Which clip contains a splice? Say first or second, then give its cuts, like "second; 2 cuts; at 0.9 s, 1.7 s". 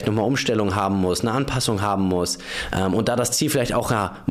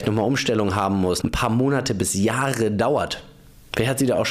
second; 1 cut; at 1.2 s